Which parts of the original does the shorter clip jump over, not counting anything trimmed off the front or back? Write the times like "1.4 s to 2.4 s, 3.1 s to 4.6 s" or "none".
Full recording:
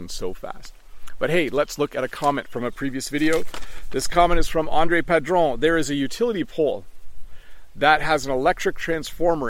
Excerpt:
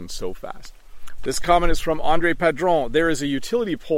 1.2 s to 3.9 s